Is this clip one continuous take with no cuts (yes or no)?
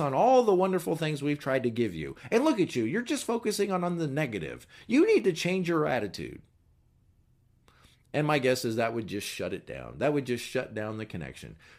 yes